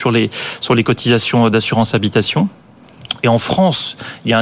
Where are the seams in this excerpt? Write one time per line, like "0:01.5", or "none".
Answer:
0:03.2